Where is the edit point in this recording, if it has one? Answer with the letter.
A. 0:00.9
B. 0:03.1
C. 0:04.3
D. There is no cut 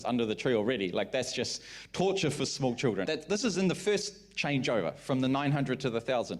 B